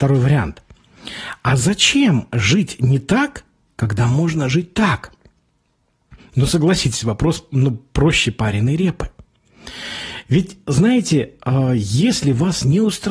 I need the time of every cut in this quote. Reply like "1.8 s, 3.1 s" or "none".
none